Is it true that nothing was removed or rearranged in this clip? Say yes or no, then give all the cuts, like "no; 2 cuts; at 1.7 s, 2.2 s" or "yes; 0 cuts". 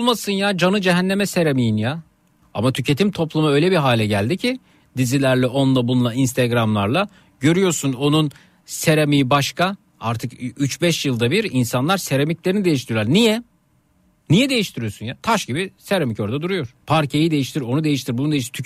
no; 2 cuts; at 2.4 s, 16.8 s